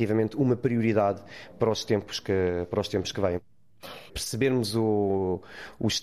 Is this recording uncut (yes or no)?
no